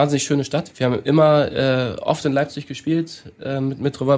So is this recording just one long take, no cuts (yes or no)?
yes